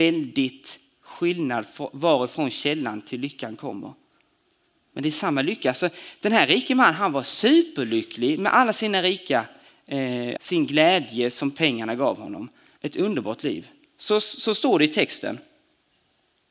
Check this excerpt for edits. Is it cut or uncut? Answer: cut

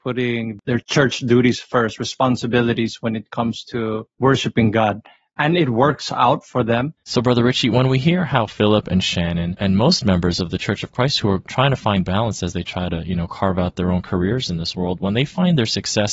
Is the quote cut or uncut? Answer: cut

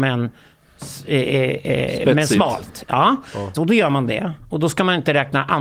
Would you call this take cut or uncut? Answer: cut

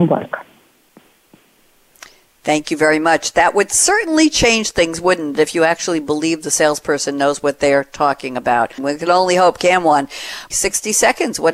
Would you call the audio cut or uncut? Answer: cut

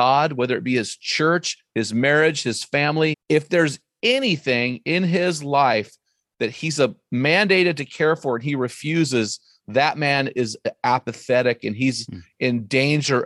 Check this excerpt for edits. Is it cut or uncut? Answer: cut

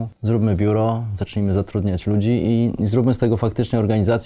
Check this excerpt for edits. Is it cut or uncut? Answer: uncut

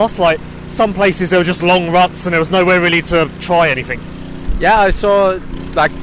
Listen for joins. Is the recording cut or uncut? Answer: uncut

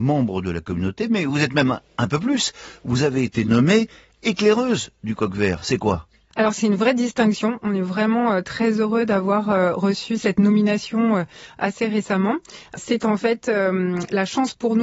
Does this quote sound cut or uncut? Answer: uncut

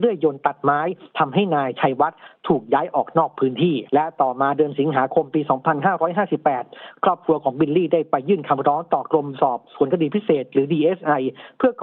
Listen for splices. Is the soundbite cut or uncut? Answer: cut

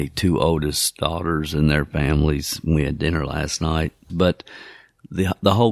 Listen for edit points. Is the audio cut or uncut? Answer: cut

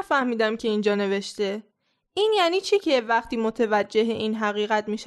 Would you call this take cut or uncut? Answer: uncut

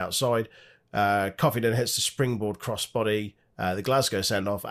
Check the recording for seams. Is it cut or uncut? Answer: uncut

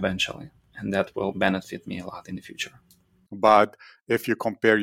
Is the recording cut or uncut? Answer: cut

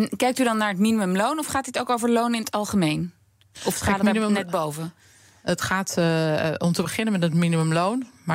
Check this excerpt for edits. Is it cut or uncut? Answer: uncut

